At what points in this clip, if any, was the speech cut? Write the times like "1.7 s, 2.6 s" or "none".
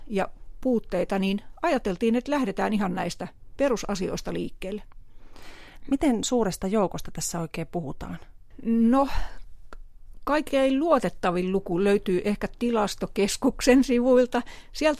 5.8 s